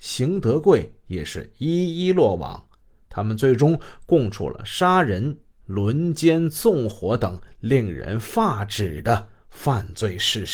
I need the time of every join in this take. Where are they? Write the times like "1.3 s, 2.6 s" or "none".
5.6 s